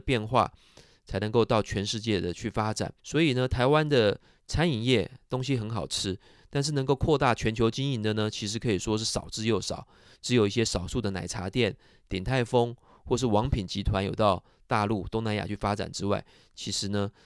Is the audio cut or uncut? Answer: cut